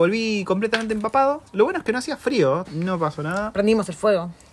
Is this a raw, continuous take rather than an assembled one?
no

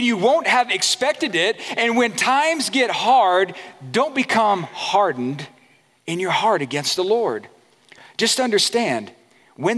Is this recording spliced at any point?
no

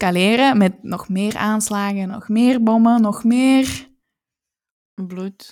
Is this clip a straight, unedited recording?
yes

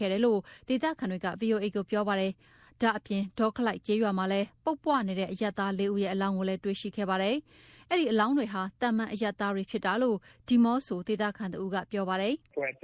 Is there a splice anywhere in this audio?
no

